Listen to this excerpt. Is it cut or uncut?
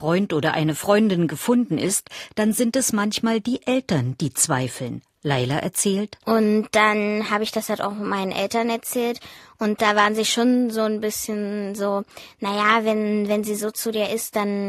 cut